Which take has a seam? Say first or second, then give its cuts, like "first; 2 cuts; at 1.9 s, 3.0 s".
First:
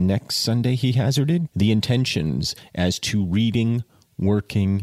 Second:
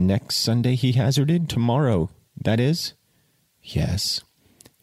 first; 1 cut; at 1.5 s